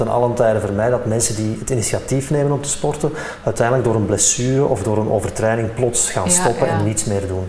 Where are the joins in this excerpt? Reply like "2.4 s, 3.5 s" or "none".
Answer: none